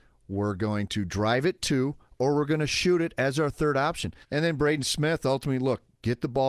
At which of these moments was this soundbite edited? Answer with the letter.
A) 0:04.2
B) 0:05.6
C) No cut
A